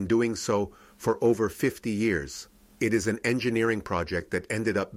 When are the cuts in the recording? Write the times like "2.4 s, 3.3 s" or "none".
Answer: 2.8 s